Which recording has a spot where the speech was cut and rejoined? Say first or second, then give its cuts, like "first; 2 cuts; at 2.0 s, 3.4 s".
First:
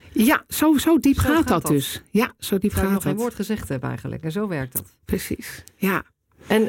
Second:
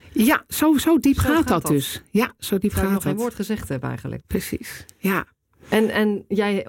second; 1 cut; at 4.2 s